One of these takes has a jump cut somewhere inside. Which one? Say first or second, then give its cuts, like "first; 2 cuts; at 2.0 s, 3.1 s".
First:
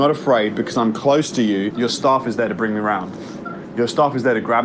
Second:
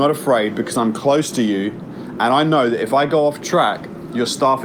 first; 1 cut; at 1.7 s